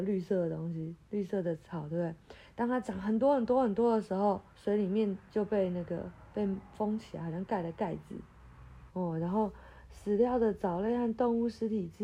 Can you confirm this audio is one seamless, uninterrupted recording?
no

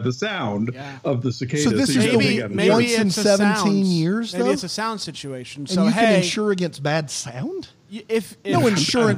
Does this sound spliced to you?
no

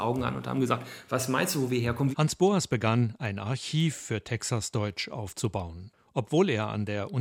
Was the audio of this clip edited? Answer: yes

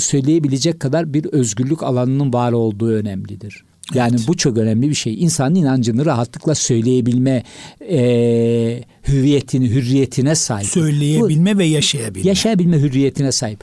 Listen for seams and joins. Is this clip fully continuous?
yes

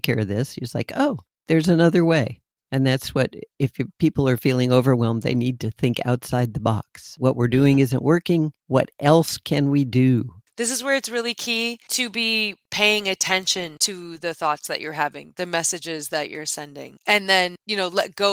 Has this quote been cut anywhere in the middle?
yes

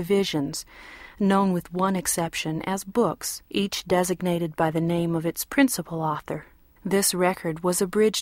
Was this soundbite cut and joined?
yes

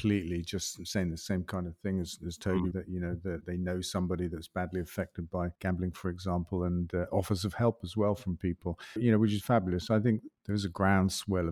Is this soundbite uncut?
no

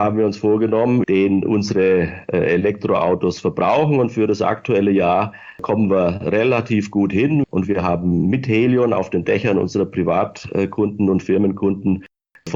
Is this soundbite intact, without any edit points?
no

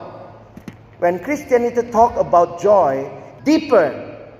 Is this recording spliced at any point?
yes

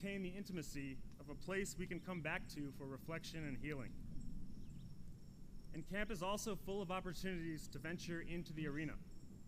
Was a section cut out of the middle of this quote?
no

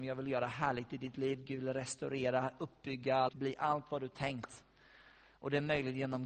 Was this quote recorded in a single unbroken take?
no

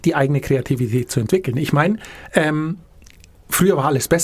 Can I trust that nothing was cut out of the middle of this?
yes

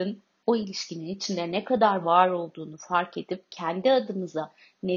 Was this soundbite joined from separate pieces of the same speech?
no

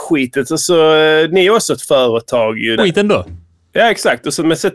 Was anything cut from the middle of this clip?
yes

